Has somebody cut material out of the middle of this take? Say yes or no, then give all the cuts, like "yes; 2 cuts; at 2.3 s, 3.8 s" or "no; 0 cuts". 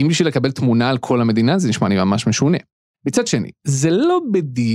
no; 0 cuts